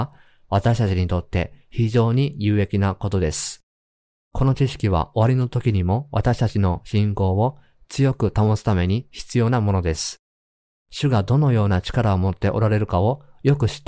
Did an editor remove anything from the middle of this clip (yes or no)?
no